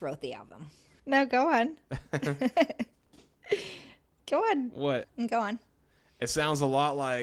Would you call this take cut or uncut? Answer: cut